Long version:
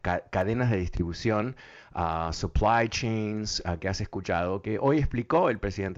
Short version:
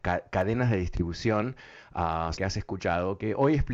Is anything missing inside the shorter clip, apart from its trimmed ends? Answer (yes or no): yes